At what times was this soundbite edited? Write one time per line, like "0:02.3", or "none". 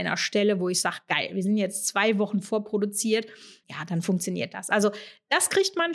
0:03.6